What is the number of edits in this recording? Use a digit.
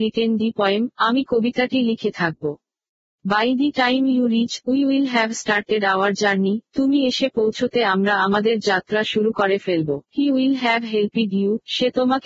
2